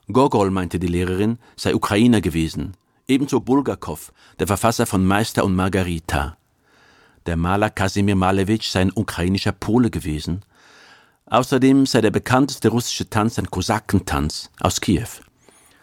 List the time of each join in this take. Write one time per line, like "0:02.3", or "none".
none